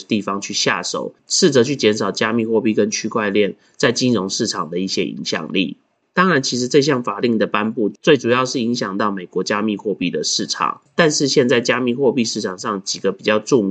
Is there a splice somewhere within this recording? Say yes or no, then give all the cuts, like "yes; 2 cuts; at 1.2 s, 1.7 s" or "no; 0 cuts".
no; 0 cuts